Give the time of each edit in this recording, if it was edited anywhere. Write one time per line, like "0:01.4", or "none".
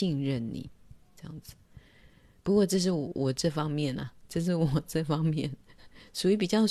none